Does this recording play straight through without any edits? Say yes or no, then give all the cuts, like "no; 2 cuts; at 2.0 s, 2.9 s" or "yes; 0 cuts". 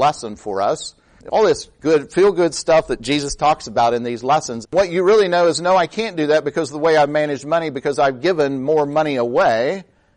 no; 1 cut; at 4.6 s